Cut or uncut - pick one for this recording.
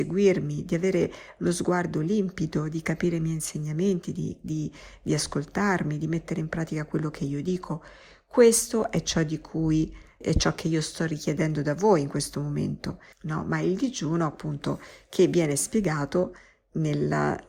cut